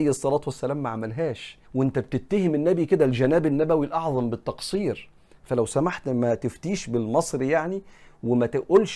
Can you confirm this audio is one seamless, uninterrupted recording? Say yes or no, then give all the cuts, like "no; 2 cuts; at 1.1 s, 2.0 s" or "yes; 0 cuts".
no; 1 cut; at 1.6 s